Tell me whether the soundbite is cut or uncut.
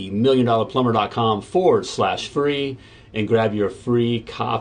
uncut